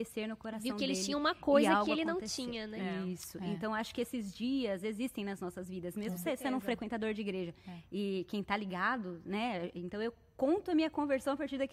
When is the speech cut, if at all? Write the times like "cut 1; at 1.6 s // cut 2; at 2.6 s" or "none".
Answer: none